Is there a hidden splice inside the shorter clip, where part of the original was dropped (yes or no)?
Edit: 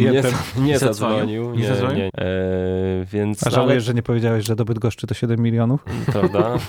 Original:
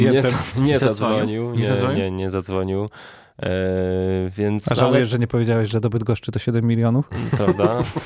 yes